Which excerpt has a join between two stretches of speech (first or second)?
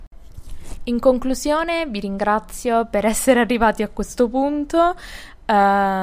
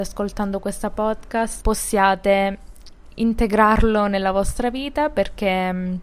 second